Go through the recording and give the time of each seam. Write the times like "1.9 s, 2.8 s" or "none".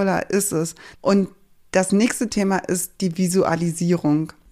0.9 s